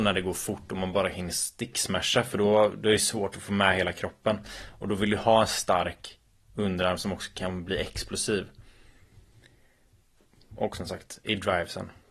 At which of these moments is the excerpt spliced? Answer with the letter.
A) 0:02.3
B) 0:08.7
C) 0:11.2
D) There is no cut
D